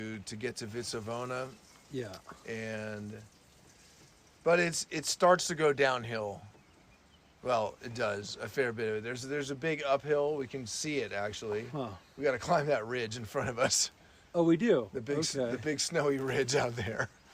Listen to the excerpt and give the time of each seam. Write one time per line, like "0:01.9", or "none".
none